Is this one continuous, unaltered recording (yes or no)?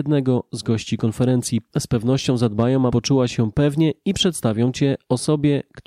no